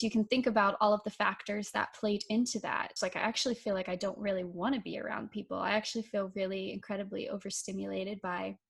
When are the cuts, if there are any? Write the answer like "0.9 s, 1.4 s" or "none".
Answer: 3.0 s

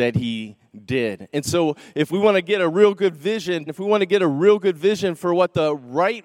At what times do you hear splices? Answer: 3.7 s

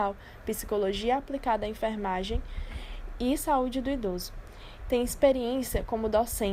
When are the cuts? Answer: 4.8 s

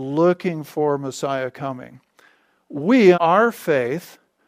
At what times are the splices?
3.1 s

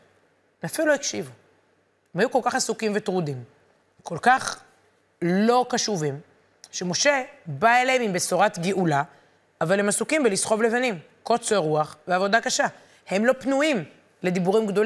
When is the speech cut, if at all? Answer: none

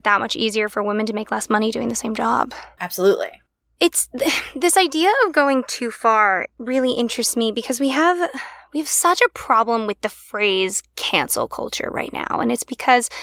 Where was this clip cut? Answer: 2.8 s

